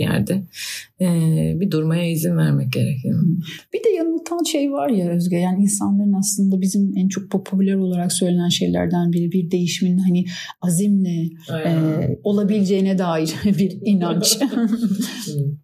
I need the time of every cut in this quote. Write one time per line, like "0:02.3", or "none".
none